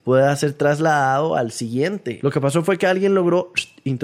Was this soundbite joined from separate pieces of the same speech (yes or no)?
yes